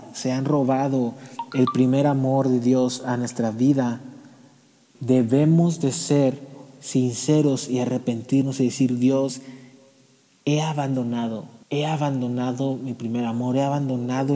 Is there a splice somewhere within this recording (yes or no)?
yes